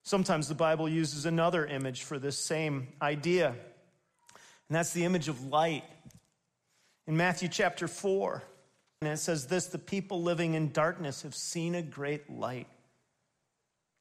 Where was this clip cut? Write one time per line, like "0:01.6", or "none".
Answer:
0:09.0